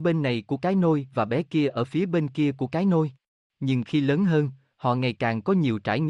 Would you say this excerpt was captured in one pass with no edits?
no; 1 cut; at 3.5 s

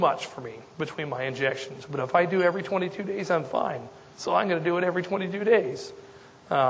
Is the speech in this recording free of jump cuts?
yes; 0 cuts

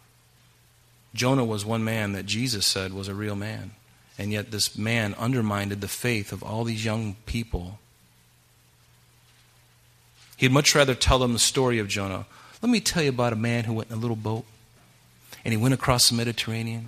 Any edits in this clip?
no; 0 cuts

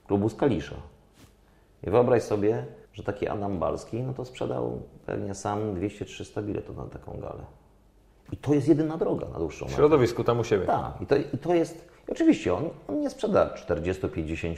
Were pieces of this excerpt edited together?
yes; 1 cut; at 2.9 s

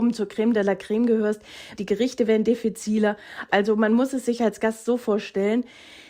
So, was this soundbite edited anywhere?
yes; 2 cuts; at 1.8 s, 3.5 s

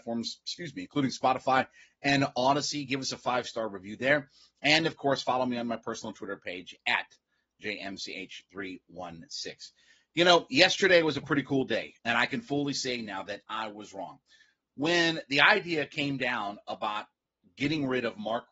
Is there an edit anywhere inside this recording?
yes; 1 cut; at 12.0 s

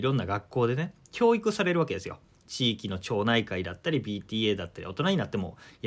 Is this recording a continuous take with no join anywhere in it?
yes; 0 cuts

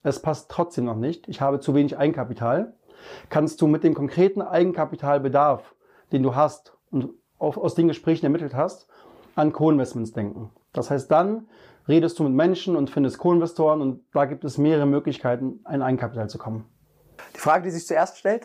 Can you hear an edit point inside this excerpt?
no; 0 cuts

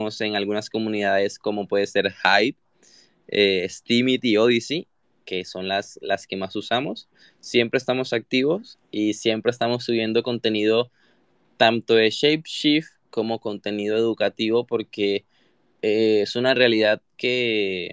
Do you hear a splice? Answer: no; 0 cuts

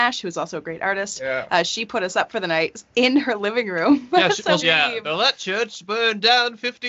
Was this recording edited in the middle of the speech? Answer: yes; 1 cut; at 4.6 s

